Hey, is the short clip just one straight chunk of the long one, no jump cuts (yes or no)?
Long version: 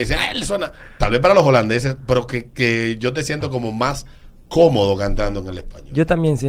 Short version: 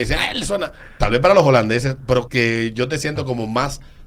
no